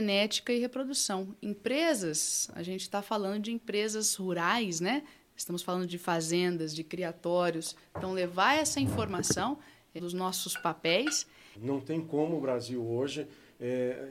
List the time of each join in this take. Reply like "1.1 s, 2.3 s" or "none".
10.0 s, 11.5 s

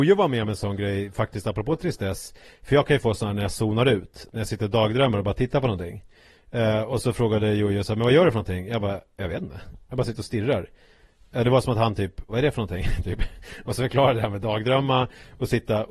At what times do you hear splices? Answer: 12.3 s

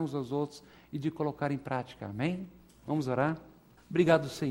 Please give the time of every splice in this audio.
none

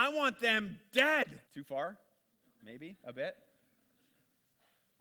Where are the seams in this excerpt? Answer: 1.4 s

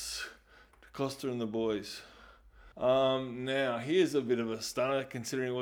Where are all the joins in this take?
2.7 s

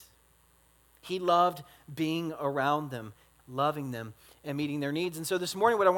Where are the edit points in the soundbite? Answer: 3.4 s

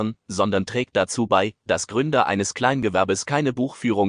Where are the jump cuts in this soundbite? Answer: none

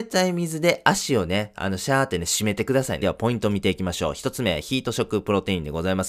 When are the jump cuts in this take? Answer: 3.0 s

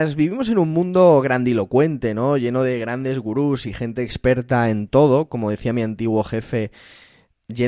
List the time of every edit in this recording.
none

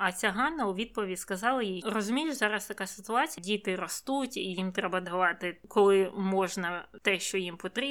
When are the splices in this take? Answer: 1.8 s, 3.4 s

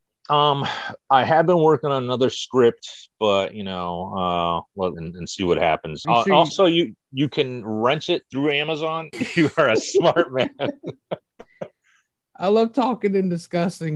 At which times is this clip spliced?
4.9 s, 6.0 s, 9.1 s

